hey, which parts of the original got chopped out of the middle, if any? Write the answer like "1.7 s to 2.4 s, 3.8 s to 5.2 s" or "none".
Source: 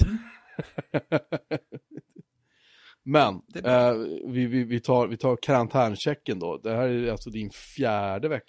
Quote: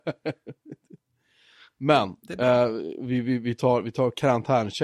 none